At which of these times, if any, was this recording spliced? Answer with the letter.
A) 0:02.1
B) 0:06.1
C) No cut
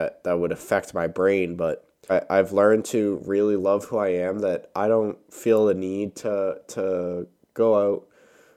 A